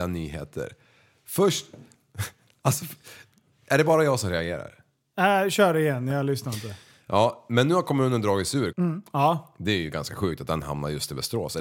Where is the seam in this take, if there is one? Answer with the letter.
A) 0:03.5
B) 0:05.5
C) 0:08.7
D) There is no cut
C